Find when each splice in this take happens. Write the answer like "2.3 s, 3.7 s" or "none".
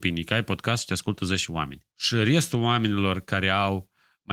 1.9 s